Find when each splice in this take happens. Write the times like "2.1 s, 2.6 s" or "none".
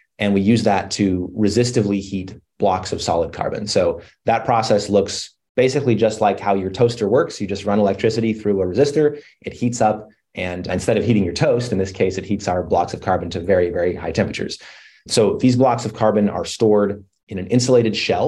none